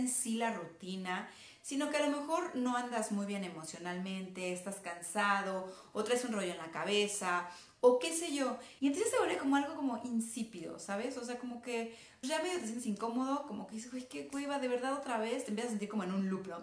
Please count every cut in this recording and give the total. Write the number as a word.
two